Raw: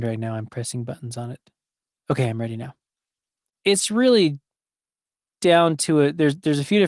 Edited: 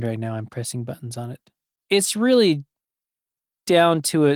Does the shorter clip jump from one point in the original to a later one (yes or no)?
yes